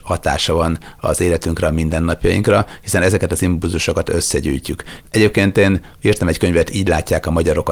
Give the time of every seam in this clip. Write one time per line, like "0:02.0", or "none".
0:05.0

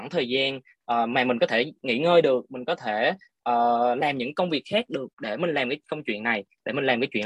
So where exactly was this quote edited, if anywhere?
0:05.1

